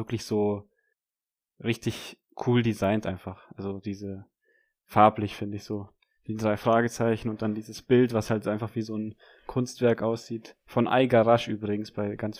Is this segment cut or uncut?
uncut